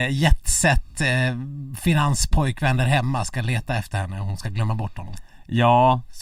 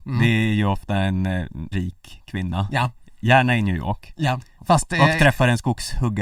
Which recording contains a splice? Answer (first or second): second